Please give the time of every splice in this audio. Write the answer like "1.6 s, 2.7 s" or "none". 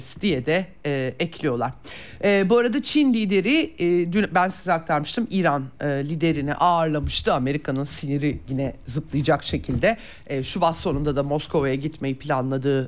none